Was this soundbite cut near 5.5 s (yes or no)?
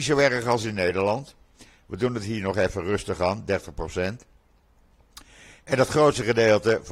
no